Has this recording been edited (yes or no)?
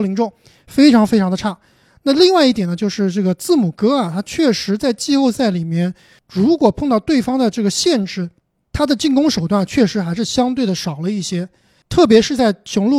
no